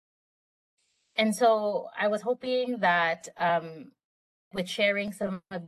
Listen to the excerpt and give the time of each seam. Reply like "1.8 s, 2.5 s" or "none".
4.5 s